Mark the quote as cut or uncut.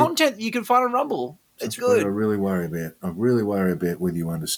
cut